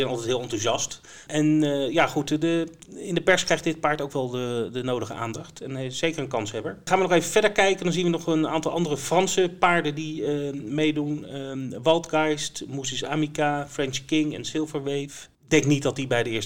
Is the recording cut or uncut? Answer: cut